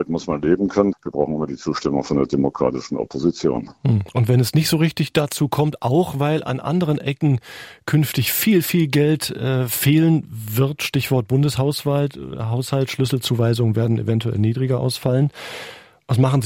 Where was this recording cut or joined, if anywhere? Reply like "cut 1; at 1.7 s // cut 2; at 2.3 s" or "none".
cut 1; at 0.9 s